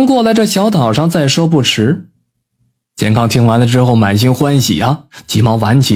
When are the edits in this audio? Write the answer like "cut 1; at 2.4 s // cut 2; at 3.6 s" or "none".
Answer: none